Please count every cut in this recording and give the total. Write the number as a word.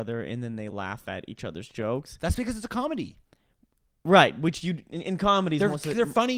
zero